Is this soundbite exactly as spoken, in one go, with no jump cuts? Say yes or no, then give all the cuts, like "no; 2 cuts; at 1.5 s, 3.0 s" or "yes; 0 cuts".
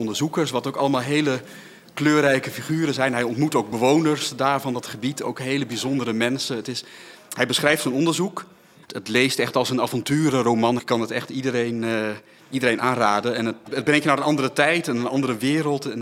no; 3 cuts; at 8.8 s, 10.8 s, 13.6 s